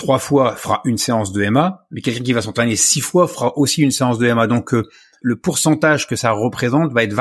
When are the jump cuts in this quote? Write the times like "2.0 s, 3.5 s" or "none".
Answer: 5.2 s